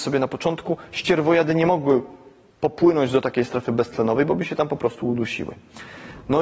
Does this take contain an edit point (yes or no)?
no